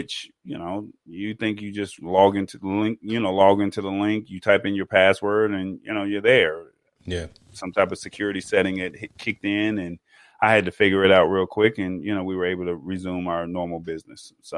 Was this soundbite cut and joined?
no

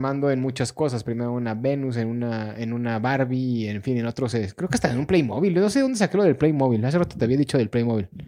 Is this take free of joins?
yes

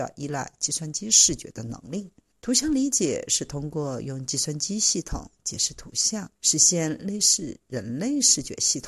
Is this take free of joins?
no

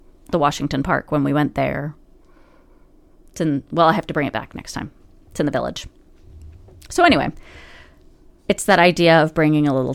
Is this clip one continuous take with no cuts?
yes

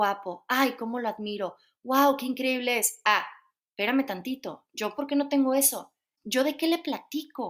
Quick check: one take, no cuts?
no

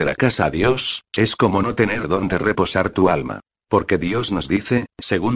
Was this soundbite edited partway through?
yes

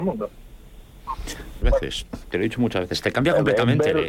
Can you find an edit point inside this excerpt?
yes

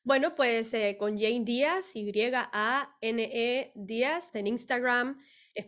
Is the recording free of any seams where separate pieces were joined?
no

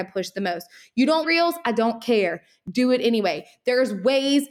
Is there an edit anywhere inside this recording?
yes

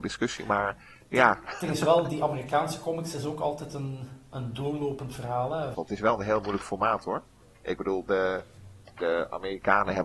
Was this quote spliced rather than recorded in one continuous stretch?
yes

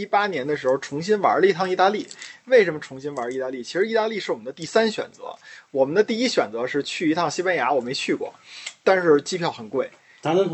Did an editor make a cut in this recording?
no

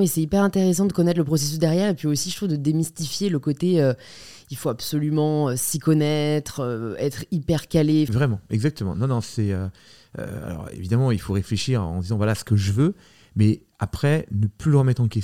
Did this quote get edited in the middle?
yes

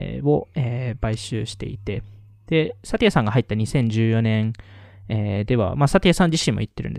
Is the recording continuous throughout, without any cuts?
yes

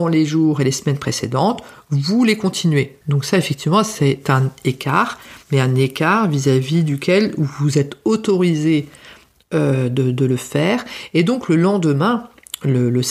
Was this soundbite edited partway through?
yes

